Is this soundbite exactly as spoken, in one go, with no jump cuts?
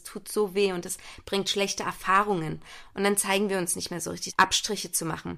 no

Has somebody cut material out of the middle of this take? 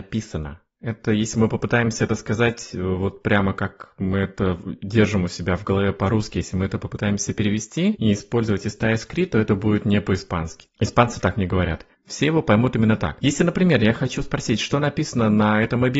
yes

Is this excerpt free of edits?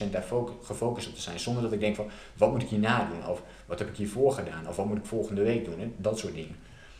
yes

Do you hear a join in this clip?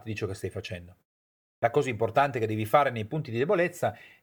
yes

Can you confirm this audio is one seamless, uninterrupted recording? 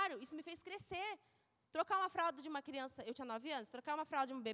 yes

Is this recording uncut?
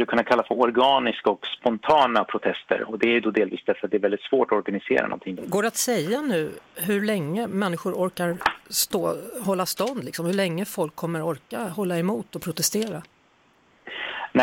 no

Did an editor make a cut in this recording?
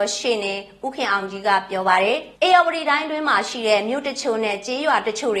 yes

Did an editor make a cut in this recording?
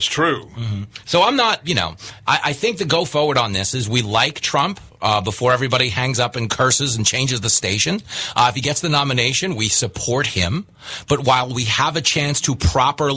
no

